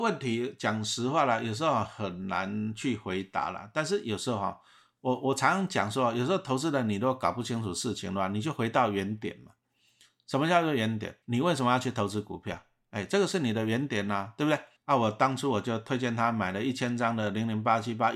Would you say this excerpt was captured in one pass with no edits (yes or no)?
no